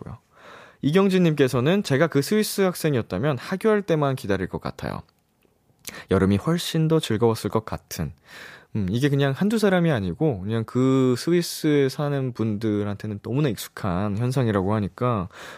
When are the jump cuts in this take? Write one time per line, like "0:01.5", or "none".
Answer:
none